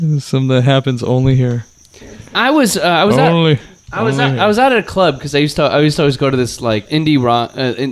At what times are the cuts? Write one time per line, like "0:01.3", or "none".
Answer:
0:06.8